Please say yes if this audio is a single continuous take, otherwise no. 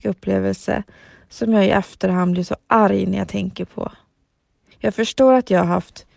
no